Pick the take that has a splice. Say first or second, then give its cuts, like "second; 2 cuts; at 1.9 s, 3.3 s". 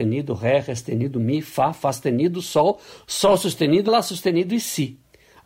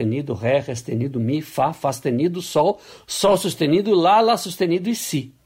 first; 1 cut; at 3.9 s